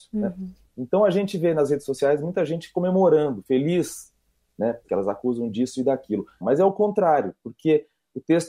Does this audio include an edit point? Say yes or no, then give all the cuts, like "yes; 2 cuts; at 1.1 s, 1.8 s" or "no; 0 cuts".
yes; 2 cuts; at 4.8 s, 6.4 s